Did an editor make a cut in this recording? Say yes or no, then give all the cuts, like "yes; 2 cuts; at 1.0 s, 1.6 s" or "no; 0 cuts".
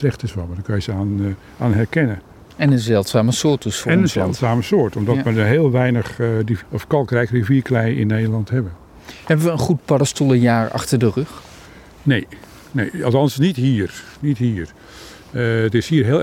yes; 1 cut; at 6.6 s